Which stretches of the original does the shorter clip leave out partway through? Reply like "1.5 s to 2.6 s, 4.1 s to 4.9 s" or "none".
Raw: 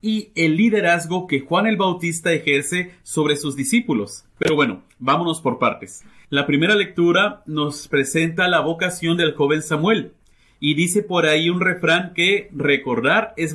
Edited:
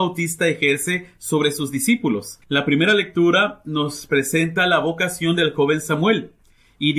4.3 s to 6.2 s